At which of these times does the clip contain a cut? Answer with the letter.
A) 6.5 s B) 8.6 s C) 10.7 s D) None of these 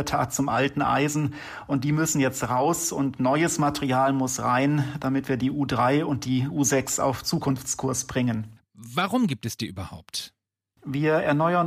B